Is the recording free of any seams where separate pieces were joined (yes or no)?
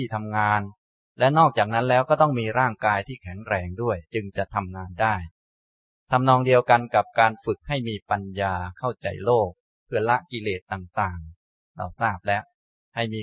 no